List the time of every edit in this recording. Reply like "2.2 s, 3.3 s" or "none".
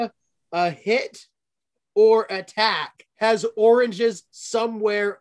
3.1 s